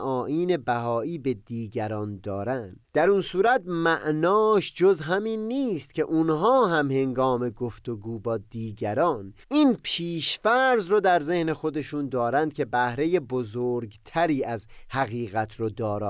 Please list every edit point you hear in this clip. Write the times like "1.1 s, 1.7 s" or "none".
2.8 s, 9.4 s